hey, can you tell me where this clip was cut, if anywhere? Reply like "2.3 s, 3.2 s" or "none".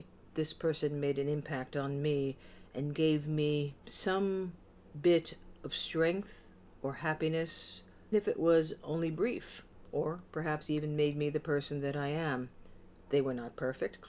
3.8 s, 8.1 s